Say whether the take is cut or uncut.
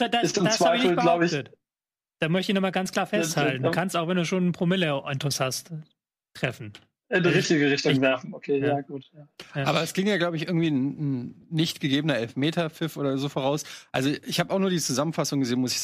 uncut